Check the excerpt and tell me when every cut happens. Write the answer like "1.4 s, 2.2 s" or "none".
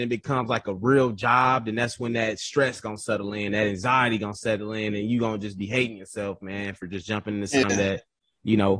none